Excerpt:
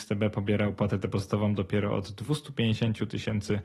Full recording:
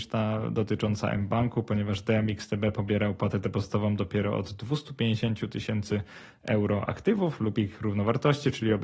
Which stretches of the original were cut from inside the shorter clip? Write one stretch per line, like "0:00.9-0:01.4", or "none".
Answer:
none